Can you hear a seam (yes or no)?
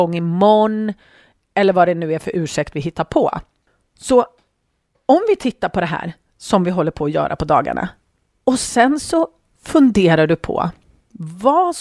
no